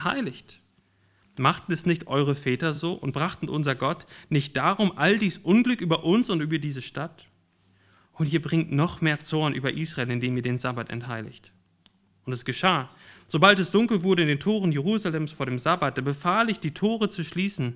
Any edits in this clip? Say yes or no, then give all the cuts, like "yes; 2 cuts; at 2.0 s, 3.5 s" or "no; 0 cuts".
no; 0 cuts